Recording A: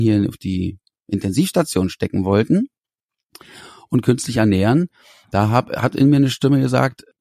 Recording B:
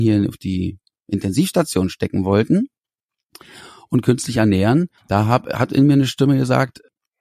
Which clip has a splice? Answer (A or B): B